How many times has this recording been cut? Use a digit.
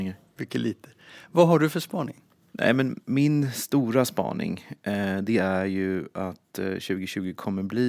0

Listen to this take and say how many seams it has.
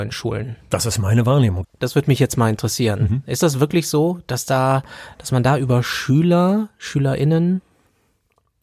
1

